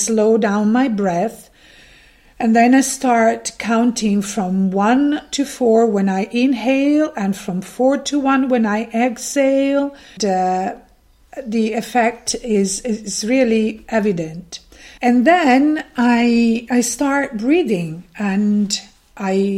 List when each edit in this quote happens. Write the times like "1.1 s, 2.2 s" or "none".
10.2 s, 15.0 s